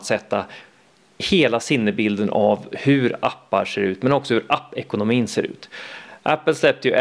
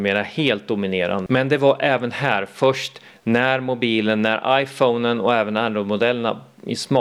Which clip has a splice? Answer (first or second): second